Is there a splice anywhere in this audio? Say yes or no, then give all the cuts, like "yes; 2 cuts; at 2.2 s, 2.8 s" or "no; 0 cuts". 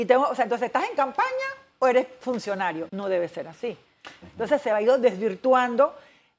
yes; 2 cuts; at 2.9 s, 4.2 s